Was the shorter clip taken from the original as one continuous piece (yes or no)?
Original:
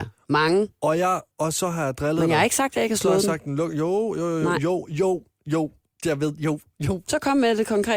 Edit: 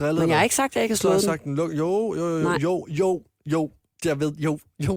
yes